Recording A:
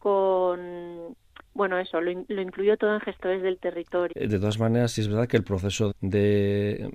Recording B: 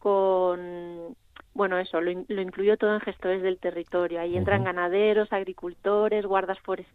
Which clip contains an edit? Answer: A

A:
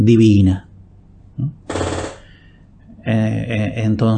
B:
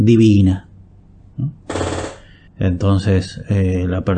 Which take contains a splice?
B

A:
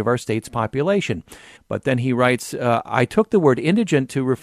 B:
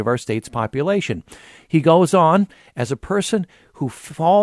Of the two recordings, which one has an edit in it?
A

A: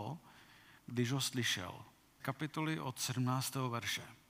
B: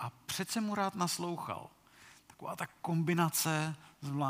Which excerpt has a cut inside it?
A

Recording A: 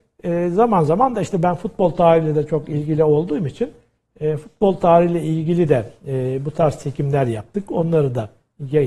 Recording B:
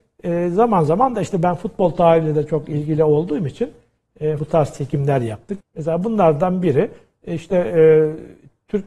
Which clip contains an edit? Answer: B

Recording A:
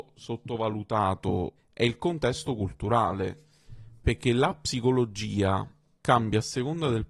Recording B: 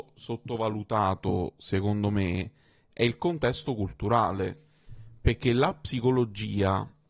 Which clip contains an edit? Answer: A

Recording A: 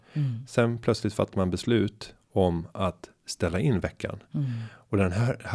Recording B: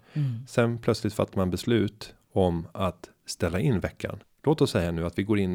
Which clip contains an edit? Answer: B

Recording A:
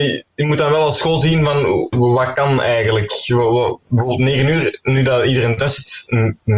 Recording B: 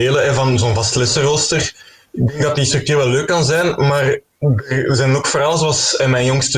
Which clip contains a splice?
A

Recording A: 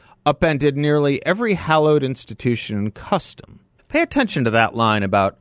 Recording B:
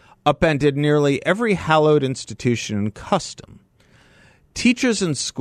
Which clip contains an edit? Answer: A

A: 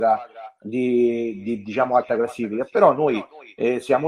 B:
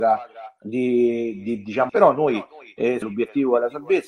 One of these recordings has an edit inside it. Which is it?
B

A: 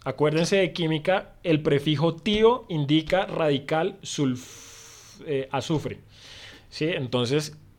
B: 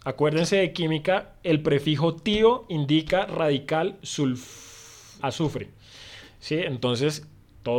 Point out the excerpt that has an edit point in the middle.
B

